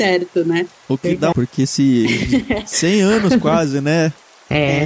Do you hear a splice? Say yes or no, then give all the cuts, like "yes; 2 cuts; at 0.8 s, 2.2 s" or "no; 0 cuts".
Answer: yes; 1 cut; at 1.3 s